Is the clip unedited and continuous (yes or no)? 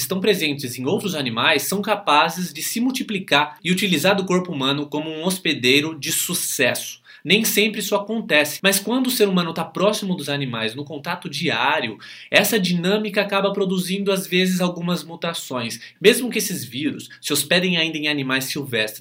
no